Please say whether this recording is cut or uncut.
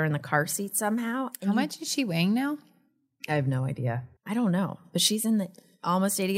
cut